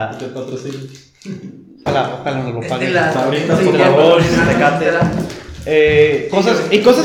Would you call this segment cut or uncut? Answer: cut